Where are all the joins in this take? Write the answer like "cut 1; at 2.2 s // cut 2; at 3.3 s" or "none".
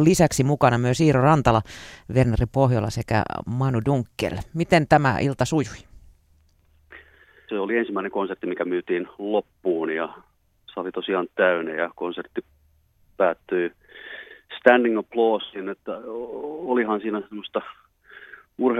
cut 1; at 7.5 s